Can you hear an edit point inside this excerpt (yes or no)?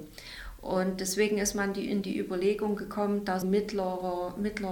yes